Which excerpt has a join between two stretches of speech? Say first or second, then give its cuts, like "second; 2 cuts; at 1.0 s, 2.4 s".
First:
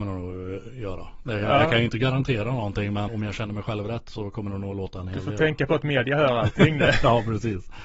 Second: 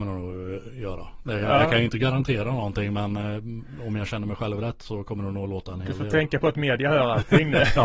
first; 1 cut; at 3.1 s